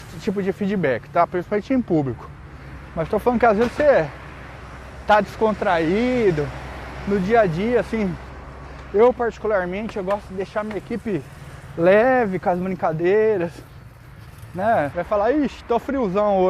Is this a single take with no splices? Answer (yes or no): no